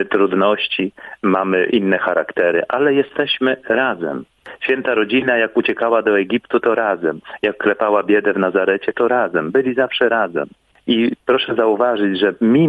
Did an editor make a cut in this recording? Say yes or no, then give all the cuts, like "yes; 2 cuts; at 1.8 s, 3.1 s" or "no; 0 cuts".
no; 0 cuts